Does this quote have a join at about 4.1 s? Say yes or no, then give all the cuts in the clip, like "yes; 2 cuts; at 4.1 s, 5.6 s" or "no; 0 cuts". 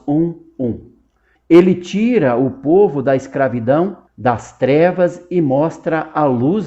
yes; 2 cuts; at 1.4 s, 4.1 s